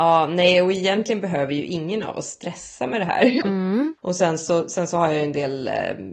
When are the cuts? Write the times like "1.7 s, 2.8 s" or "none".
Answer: 3.4 s